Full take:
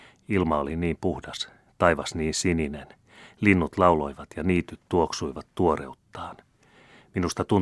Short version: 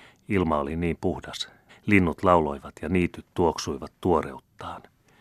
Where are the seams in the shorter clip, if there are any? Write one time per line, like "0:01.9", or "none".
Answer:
0:01.7

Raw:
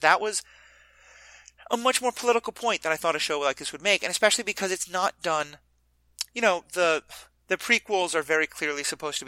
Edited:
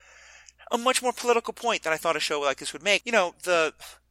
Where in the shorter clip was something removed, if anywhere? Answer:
0:03.0

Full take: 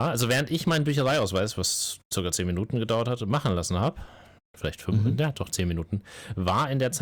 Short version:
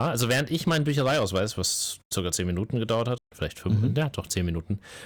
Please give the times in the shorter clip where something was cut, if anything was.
0:03.2

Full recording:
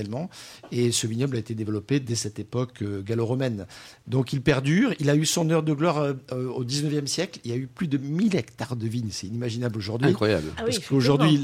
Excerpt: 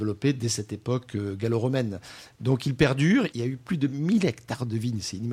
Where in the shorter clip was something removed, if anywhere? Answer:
0:03.3

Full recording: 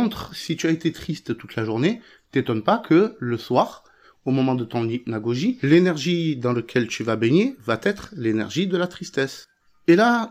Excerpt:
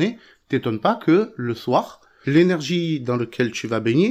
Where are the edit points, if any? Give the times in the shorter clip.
0:02.2

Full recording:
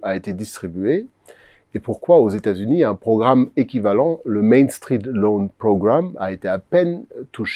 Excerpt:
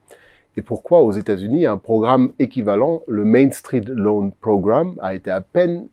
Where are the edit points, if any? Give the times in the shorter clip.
none

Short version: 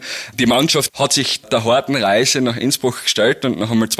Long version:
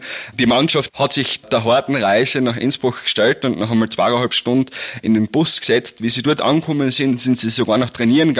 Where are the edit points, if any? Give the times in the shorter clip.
none

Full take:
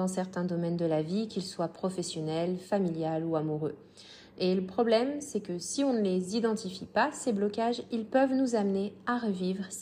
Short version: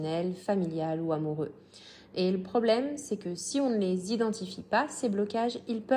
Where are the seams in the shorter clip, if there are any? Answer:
none

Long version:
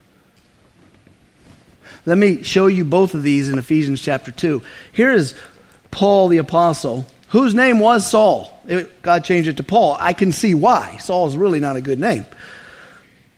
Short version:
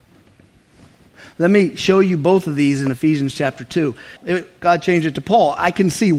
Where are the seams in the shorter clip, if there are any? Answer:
0:04.2

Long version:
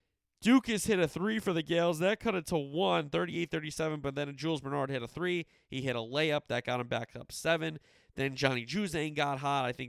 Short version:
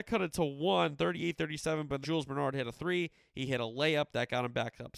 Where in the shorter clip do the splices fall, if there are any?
0:02.0

